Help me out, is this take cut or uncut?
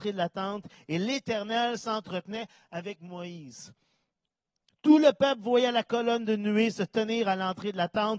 uncut